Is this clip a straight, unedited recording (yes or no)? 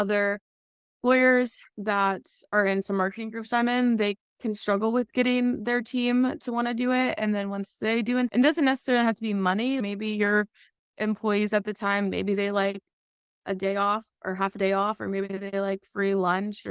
yes